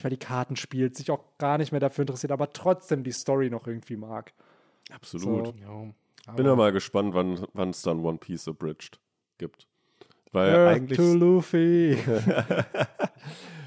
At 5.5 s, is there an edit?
no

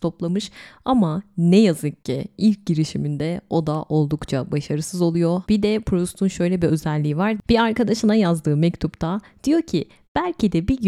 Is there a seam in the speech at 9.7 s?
no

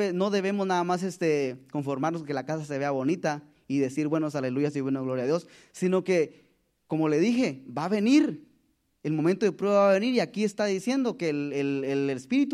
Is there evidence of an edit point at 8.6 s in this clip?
no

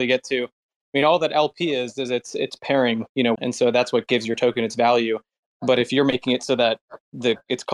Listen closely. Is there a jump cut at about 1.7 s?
no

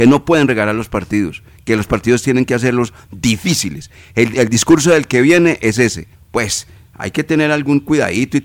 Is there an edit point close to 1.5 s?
no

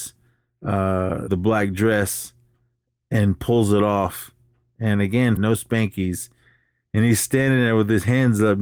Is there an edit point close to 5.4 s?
yes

